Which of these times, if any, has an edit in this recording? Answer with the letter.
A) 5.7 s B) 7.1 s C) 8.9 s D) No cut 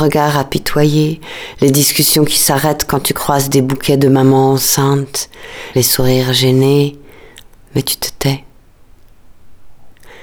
A